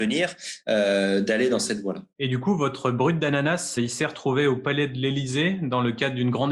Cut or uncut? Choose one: cut